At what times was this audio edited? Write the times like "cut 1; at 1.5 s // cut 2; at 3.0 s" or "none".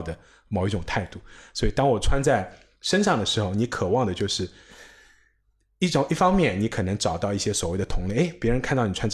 none